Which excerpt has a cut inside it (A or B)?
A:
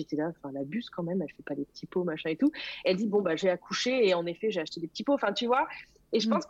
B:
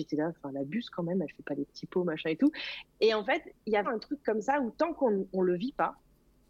B